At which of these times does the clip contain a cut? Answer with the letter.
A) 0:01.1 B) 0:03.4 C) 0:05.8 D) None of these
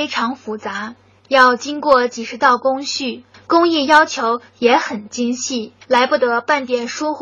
C